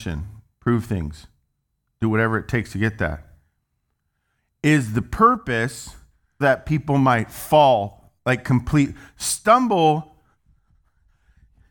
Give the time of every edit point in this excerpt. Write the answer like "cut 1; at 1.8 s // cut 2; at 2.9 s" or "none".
cut 1; at 6.4 s